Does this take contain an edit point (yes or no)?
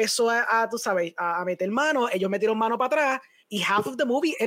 yes